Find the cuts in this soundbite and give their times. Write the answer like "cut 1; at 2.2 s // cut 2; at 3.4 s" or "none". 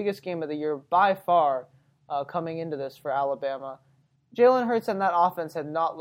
cut 1; at 4.2 s